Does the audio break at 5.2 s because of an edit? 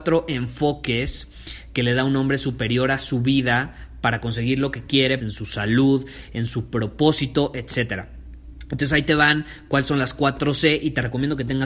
yes; 1 cut; at 5.2 s

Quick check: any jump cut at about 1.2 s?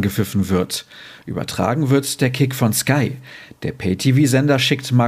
no; 0 cuts

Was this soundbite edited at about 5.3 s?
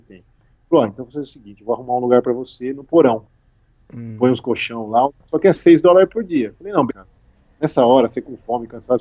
yes; 2 cuts; at 5.3 s, 6.9 s

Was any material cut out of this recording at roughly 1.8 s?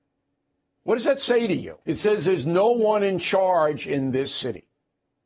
yes; 1 cut; at 1.8 s

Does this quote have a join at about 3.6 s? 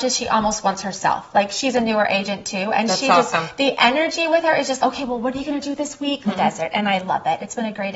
no; 2 cuts; at 4.8 s, 6.2 s

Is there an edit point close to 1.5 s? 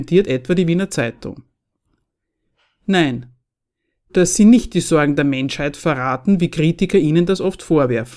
no; 1 cut; at 4.1 s

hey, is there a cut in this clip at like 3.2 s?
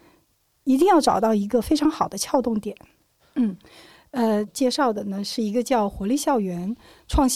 yes; 2 cuts; at 3.2 s, 4.5 s

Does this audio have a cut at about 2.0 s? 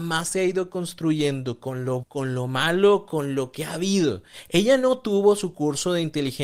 yes; 1 cut; at 2.0 s

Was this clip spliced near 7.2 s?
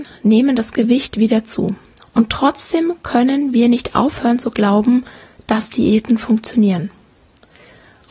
no; 1 cut; at 2.0 s

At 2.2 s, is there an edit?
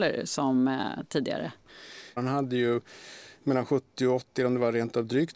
yes; 1 cut; at 2.2 s

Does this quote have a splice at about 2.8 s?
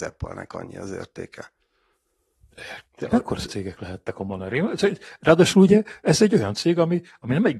yes; 1 cut; at 2.8 s

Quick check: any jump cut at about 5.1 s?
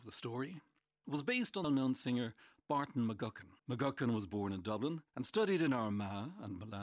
yes; 3 cuts; at 1.6 s, 3.6 s, 5.1 s

